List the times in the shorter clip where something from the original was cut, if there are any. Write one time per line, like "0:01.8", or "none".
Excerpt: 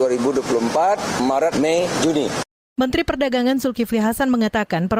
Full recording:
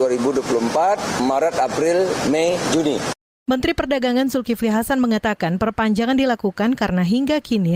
0:01.5